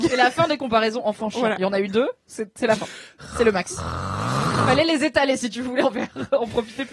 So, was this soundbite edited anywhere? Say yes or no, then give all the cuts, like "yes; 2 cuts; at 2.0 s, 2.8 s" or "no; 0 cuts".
no; 0 cuts